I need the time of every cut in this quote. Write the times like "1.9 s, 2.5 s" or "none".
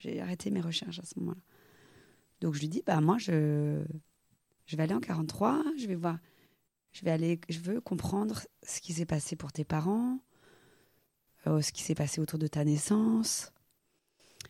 none